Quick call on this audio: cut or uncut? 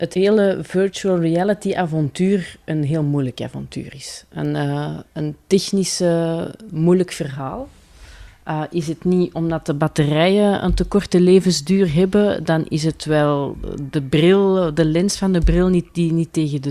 uncut